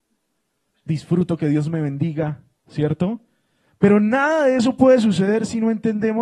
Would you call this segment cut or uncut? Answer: uncut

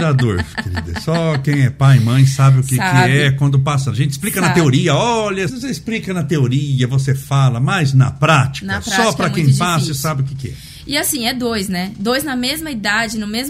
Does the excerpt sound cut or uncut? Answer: cut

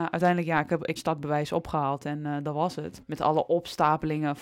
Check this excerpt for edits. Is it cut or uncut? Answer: cut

